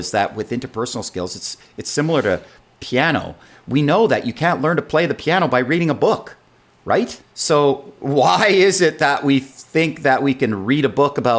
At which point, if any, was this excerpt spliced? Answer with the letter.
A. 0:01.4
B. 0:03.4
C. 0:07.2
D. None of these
C